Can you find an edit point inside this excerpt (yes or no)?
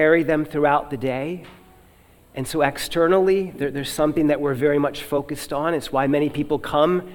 no